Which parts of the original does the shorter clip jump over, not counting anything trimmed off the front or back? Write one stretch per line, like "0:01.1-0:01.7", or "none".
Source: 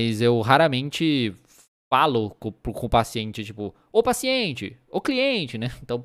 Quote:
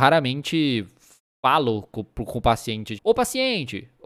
0:03.4-0:03.9